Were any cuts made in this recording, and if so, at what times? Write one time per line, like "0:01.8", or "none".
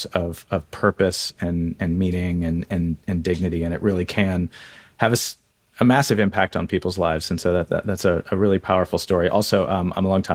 none